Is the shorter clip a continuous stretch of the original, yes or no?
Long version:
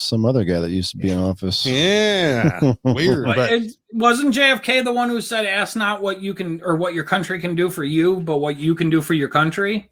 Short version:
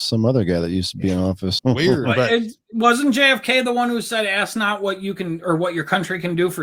no